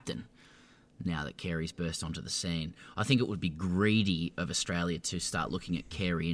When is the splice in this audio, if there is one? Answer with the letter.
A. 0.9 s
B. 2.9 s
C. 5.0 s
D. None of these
D